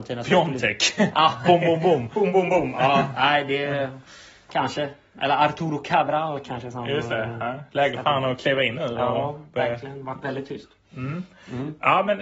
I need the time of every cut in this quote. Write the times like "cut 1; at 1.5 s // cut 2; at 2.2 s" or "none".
cut 1; at 4.5 s